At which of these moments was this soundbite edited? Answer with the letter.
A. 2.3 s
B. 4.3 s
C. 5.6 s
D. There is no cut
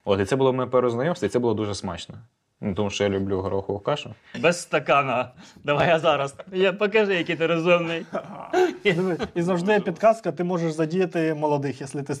B